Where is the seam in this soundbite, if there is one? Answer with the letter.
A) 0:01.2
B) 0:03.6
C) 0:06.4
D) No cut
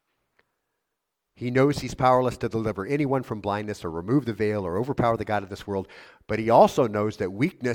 D